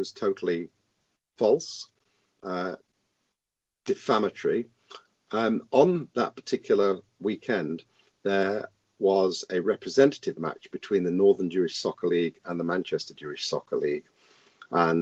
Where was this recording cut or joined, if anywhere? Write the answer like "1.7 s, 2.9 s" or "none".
none

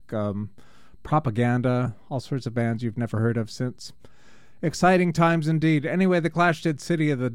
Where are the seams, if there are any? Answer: none

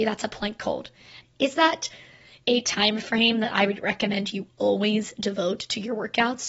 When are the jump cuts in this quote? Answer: 1.2 s

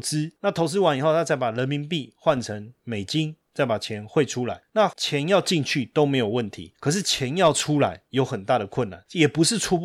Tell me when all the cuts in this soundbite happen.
none

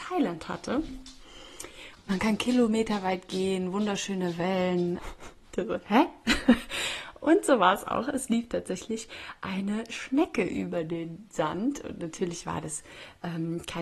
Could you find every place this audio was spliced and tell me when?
1.9 s, 5.0 s

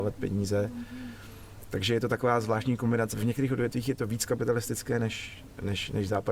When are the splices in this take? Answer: 3.1 s

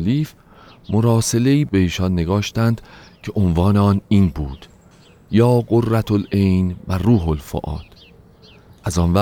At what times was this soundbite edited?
none

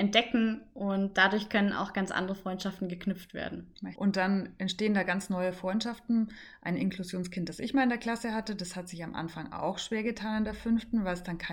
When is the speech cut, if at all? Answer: 3.9 s

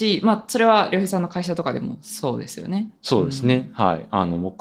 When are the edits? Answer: none

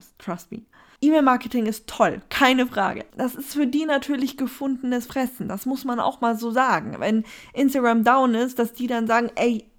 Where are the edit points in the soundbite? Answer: 1.0 s, 3.1 s

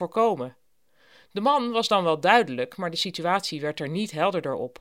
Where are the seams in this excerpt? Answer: none

